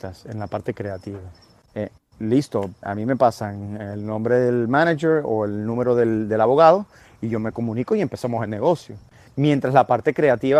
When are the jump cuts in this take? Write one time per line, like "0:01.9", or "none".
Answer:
0:01.6
0:02.8